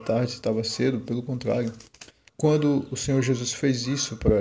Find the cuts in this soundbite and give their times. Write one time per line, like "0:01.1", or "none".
0:02.3